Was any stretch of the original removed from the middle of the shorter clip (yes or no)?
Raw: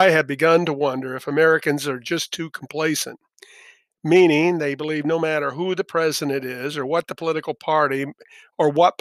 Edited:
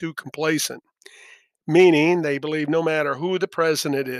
no